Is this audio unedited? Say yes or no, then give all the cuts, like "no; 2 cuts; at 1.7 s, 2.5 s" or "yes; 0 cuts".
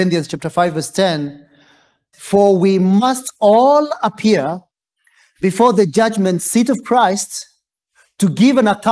no; 1 cut; at 2.1 s